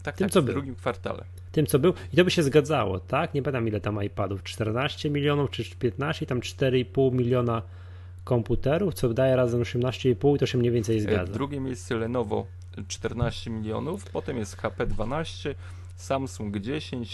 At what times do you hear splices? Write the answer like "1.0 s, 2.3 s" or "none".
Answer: none